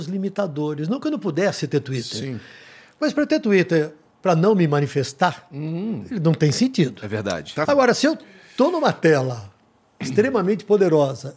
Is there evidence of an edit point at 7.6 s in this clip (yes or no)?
yes